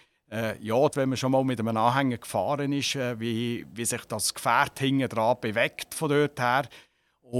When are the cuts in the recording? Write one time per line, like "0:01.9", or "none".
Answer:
0:00.9